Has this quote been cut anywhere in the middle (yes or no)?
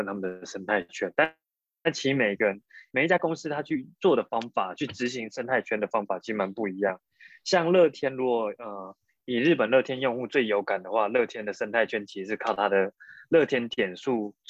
no